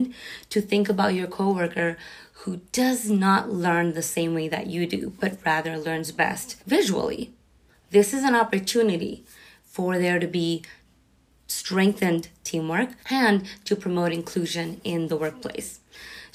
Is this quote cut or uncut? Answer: cut